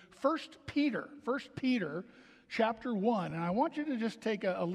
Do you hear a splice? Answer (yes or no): no